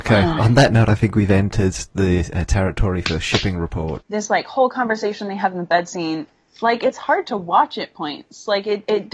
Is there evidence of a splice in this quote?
yes; 1 cut; at 4.0 s

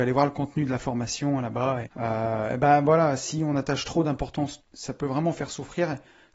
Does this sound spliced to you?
yes; 2 cuts; at 1.9 s, 4.6 s

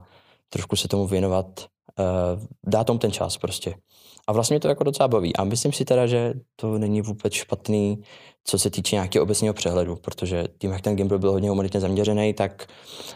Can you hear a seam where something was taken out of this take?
no; 0 cuts

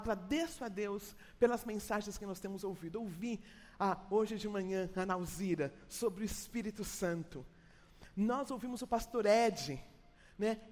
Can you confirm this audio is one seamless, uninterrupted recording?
yes; 0 cuts

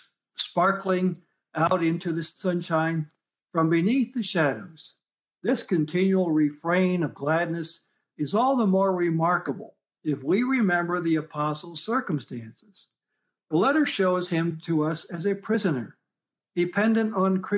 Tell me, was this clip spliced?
no; 0 cuts

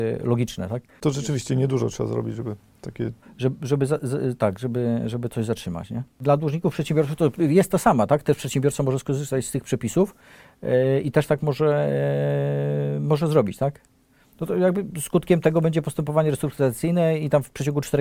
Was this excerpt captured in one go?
yes; 0 cuts

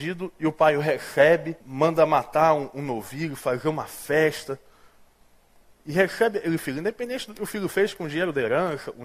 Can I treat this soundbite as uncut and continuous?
no; 1 cut; at 1.6 s

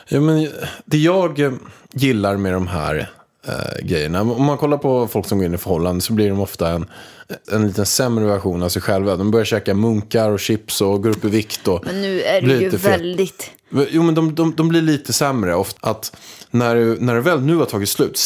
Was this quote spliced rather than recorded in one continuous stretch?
yes; 2 cuts; at 7.4 s, 15.8 s

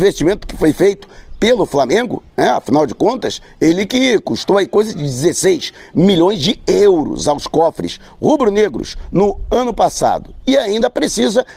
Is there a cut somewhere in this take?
no; 0 cuts

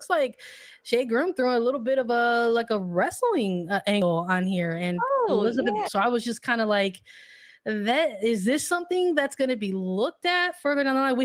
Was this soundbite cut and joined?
yes; 1 cut; at 5.8 s

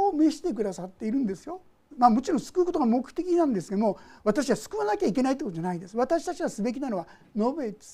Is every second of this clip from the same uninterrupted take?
no; 1 cut; at 1.9 s

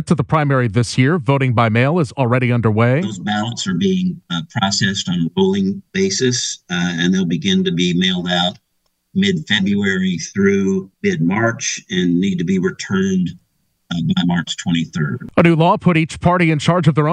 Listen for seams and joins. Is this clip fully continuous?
no; 1 cut; at 10.9 s

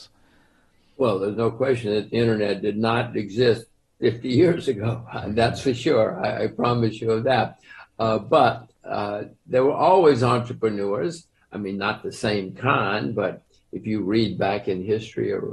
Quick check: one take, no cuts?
yes; 0 cuts

